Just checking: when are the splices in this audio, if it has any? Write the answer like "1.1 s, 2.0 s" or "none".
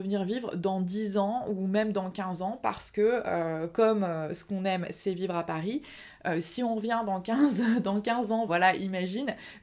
8.5 s